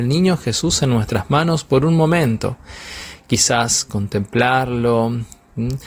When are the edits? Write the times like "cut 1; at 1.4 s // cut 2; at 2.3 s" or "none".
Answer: none